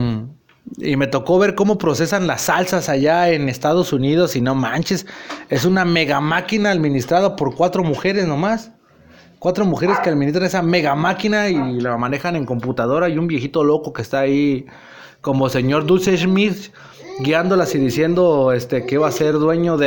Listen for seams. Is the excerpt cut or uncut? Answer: uncut